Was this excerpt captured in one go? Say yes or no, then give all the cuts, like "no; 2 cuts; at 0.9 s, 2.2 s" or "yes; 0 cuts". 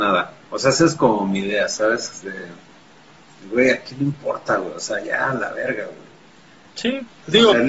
yes; 0 cuts